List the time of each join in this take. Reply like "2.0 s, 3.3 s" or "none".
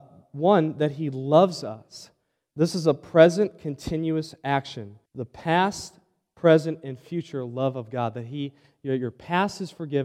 5.0 s

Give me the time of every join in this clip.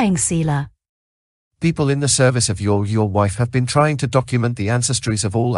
none

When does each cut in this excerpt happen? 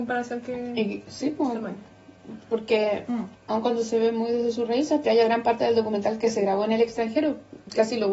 3.4 s, 5.0 s

